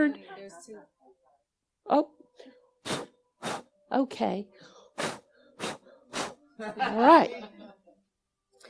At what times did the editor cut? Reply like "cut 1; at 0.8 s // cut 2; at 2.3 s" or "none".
none